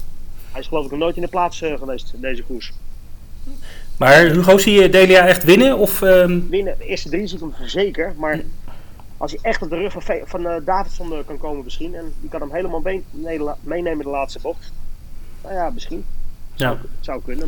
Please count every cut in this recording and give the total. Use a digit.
1